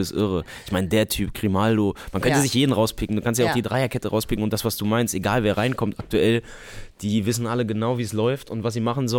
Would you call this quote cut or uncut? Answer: uncut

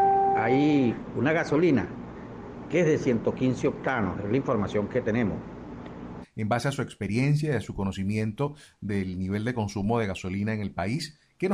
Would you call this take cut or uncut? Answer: cut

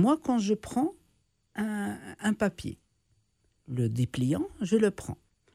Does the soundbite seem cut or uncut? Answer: uncut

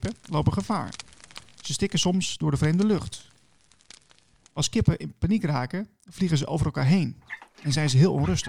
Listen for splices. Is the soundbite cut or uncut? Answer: uncut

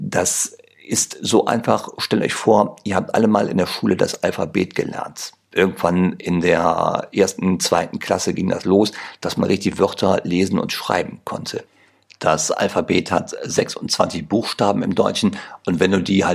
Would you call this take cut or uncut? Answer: uncut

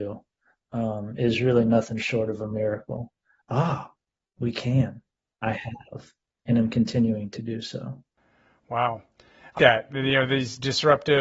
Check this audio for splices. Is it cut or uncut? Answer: cut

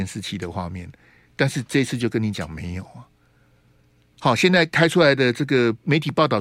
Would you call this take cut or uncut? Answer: cut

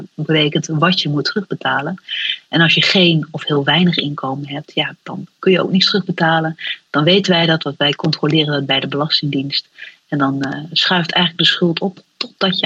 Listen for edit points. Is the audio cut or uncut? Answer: uncut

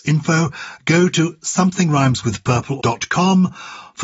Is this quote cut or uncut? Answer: cut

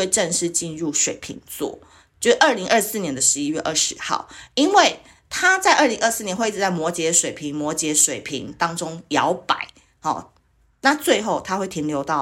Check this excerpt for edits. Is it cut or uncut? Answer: uncut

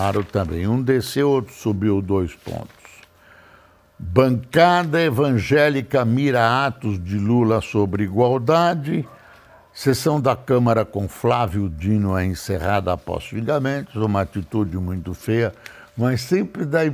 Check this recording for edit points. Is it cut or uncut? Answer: uncut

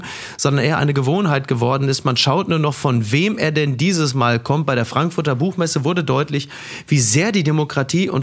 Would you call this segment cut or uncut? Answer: uncut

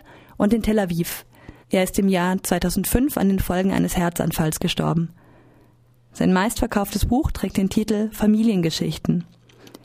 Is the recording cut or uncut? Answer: cut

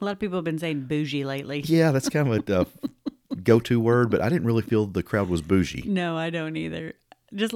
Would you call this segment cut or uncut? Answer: uncut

